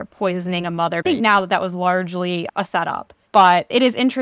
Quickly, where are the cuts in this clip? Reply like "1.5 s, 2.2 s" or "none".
1.0 s